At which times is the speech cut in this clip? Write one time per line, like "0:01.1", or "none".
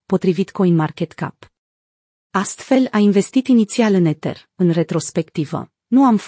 0:02.3
0:04.5